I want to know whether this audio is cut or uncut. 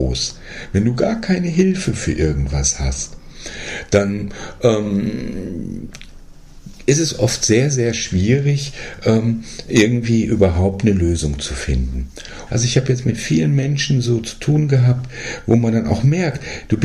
cut